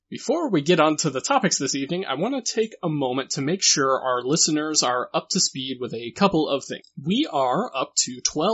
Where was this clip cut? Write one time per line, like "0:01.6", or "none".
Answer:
none